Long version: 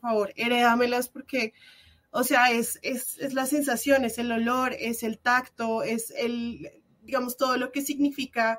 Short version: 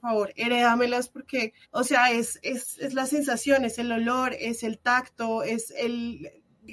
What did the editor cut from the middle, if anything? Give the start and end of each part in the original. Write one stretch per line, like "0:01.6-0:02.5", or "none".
0:01.6-0:02.0